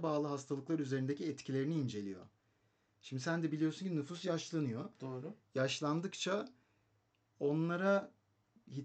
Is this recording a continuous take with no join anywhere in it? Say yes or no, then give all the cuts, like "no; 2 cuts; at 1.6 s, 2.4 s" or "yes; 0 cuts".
yes; 0 cuts